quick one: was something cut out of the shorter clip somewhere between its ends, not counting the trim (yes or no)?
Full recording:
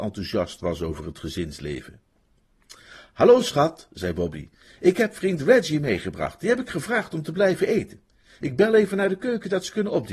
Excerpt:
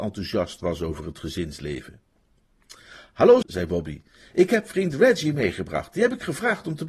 yes